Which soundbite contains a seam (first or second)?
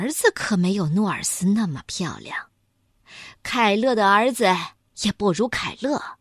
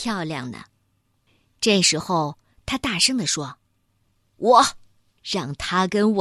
second